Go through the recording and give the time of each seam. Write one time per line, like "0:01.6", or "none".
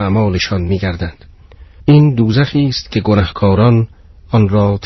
0:01.8